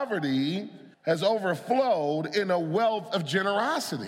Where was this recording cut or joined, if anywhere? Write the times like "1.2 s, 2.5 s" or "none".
0.9 s